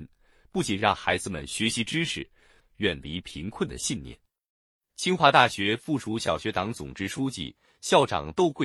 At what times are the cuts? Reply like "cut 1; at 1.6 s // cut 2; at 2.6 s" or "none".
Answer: cut 1; at 2.6 s

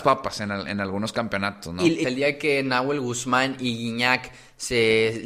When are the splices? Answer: cut 1; at 2.0 s

